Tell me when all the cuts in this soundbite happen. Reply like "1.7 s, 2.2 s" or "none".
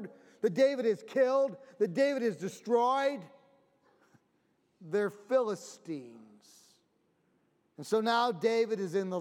none